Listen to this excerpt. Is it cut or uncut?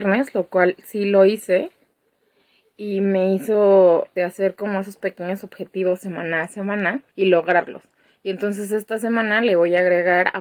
cut